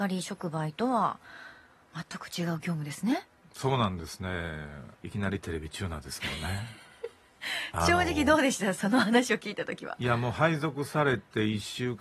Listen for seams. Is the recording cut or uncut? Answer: cut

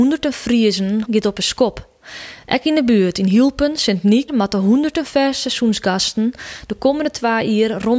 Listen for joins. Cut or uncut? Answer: cut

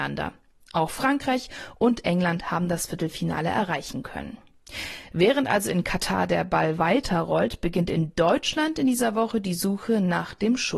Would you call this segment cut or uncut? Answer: uncut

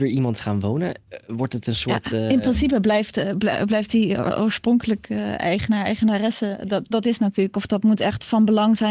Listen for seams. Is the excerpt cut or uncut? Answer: cut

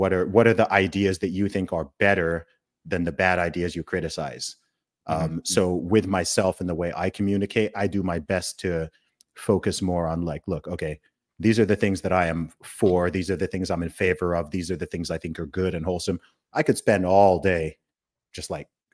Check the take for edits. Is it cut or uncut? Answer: uncut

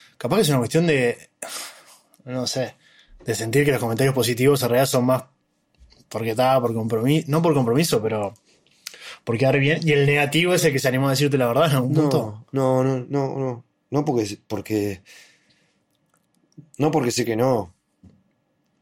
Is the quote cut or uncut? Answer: uncut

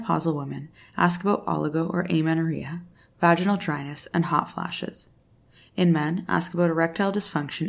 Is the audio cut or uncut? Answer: uncut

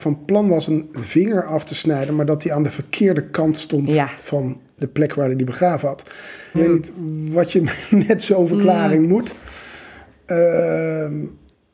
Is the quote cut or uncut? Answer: cut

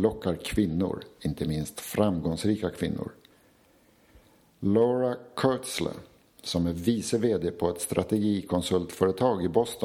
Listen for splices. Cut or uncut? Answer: uncut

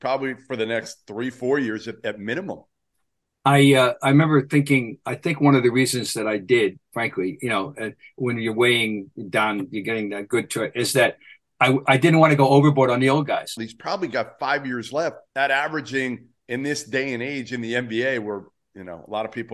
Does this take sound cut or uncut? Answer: cut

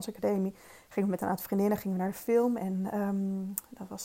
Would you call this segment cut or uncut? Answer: uncut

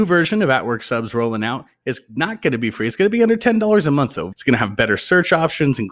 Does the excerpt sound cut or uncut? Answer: cut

